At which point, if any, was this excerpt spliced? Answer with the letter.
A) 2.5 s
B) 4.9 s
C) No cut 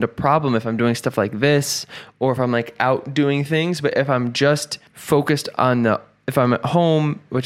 B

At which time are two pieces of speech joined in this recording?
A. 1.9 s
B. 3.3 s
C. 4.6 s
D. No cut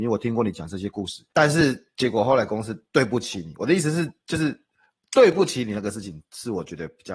D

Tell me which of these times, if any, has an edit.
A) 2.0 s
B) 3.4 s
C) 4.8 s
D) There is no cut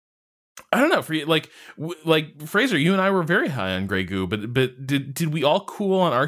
D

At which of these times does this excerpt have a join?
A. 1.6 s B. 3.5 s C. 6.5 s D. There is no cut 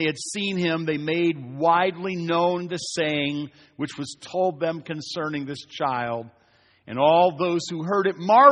D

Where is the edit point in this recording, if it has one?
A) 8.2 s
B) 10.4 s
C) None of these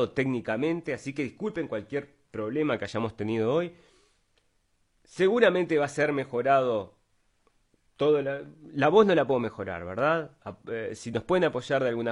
B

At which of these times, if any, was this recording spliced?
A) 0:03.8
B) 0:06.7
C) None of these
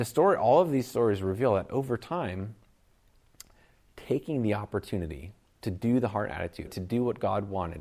B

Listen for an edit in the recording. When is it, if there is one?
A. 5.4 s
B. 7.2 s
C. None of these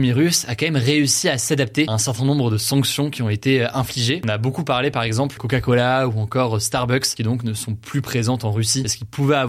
A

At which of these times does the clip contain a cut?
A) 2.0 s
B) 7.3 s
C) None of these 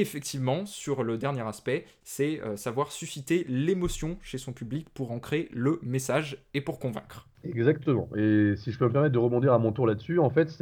A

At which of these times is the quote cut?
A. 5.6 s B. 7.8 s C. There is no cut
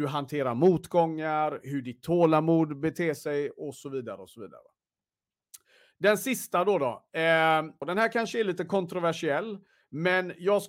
B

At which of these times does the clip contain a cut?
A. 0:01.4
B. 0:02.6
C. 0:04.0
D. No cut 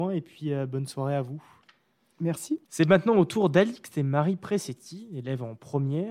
B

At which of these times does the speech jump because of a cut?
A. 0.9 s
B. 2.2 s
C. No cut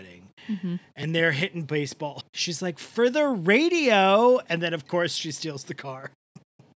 B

